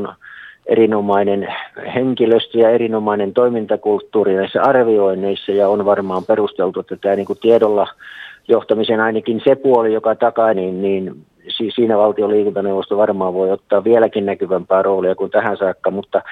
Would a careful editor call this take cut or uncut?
cut